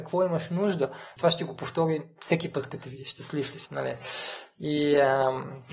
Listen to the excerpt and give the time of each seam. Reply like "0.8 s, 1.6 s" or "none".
1.2 s, 3.7 s